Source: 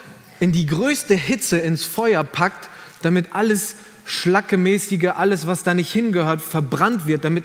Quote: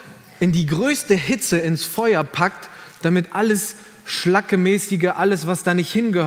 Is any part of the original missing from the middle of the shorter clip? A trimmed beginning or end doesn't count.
no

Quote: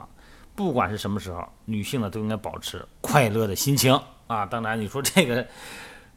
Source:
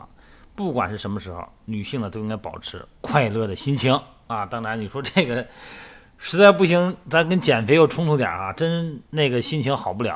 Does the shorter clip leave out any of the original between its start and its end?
no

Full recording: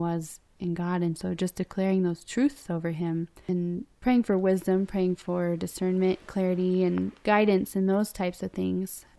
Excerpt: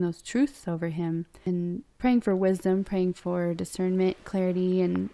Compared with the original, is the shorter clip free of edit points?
yes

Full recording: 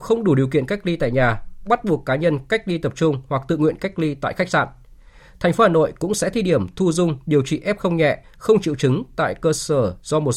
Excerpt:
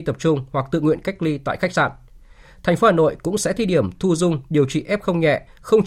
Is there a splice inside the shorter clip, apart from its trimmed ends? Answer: no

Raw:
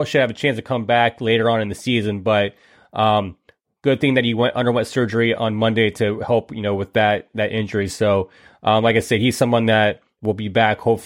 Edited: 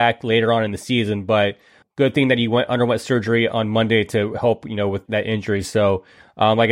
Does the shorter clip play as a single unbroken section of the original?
no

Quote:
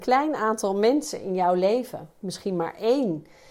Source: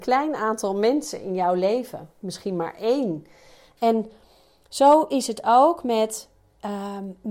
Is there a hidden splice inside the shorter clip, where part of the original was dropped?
no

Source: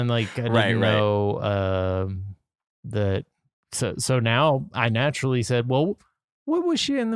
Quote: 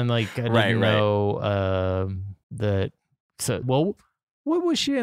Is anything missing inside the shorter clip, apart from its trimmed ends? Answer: yes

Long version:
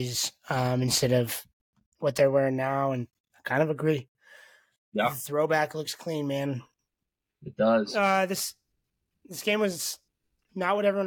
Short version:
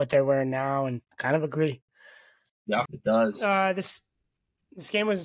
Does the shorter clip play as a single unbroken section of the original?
no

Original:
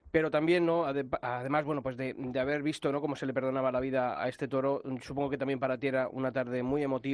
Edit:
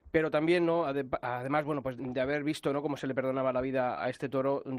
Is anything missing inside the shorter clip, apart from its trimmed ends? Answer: yes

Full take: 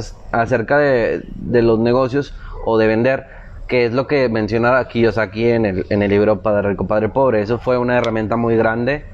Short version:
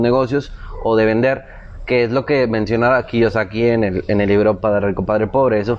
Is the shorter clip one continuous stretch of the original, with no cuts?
yes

